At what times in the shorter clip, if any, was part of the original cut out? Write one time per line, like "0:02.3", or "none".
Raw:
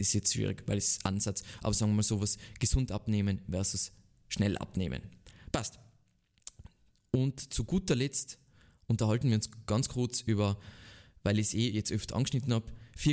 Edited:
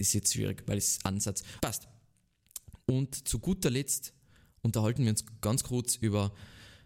0:01.6
0:02.8